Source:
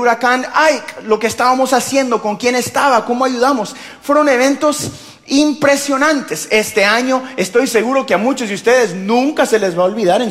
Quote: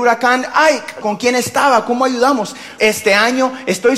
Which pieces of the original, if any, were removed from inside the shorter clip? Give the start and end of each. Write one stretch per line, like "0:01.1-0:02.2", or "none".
0:01.0-0:02.2
0:04.0-0:06.5